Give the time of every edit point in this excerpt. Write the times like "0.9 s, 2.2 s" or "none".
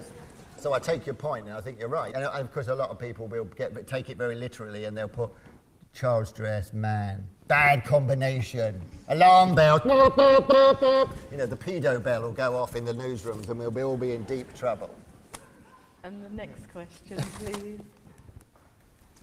2.1 s